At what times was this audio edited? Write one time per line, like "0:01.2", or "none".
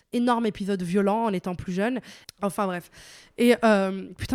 0:02.2